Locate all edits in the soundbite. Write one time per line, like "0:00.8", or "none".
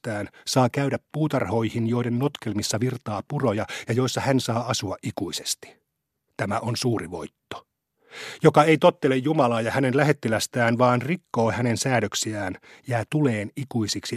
none